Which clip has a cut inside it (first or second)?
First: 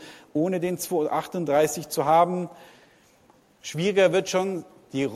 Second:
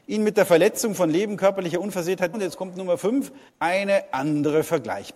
second